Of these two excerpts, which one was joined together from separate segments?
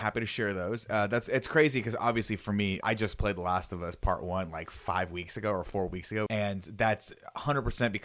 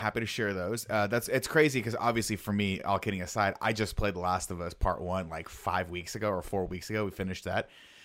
first; 2 cuts; at 2.8 s, 6.3 s

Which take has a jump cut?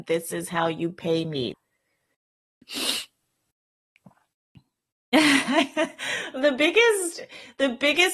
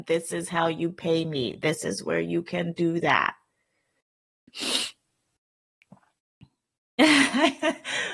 first; 1 cut; at 1.5 s

